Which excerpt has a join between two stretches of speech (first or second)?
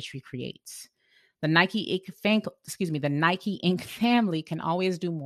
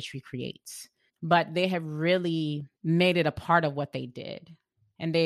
second